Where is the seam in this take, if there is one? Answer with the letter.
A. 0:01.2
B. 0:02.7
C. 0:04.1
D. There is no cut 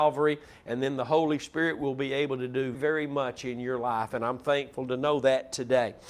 B